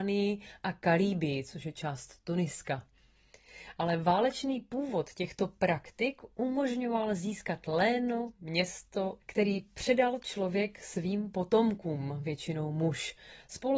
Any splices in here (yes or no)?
yes